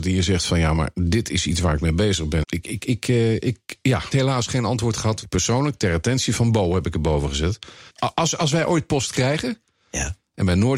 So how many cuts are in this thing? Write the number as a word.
two